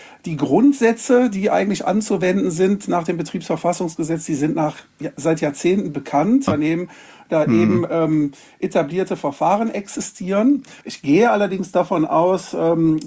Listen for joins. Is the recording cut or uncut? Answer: cut